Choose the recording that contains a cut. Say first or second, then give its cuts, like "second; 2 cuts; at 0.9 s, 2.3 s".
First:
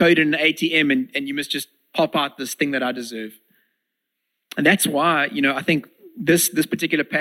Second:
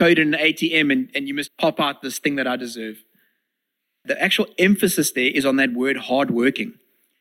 second; 2 cuts; at 1.5 s, 4.0 s